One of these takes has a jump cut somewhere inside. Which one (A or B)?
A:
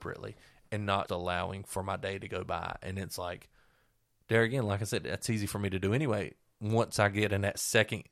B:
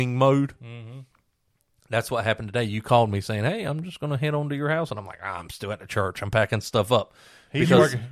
A